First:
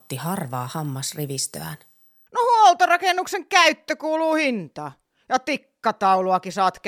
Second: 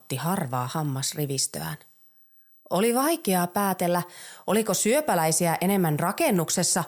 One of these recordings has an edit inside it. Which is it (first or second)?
first